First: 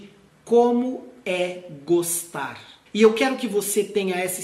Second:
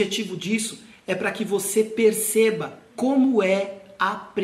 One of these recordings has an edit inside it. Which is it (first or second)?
first